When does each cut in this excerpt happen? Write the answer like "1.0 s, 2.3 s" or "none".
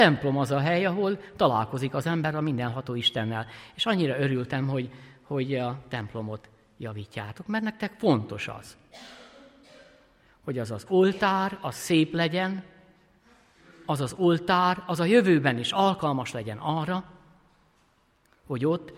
none